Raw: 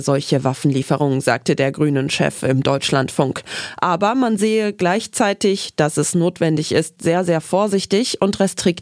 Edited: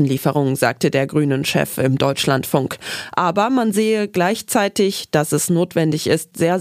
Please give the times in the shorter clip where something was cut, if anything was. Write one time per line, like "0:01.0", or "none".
none